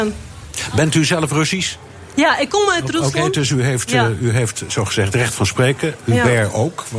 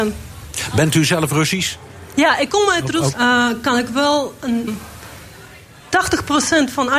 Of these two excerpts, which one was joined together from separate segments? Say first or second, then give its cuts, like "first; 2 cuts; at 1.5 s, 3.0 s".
second; 2 cuts; at 3.1 s, 4.7 s